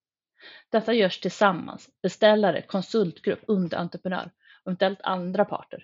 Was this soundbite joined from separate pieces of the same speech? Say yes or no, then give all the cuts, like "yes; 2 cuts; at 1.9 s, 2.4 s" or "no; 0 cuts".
yes; 1 cut; at 3.5 s